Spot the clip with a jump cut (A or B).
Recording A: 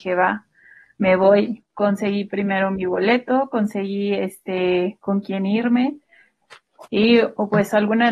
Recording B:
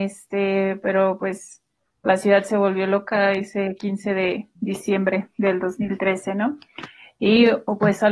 A